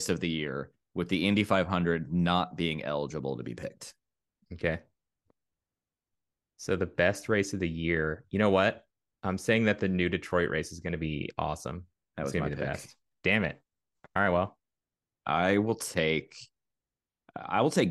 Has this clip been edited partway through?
no; 0 cuts

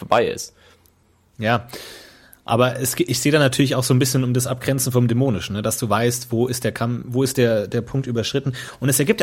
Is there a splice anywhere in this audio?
no; 0 cuts

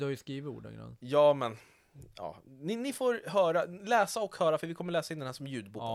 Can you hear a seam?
no; 0 cuts

